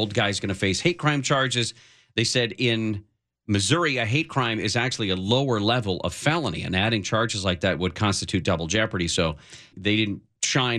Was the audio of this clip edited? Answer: yes; 1 cut; at 9.7 s

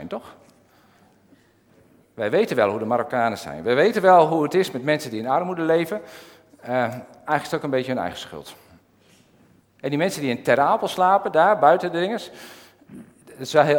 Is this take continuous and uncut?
no; 1 cut; at 9.7 s

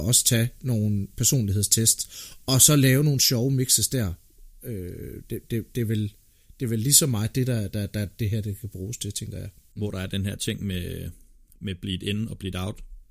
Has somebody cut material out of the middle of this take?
yes; 1 cut; at 9.7 s

